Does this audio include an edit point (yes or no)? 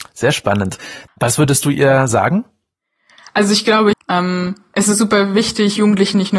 yes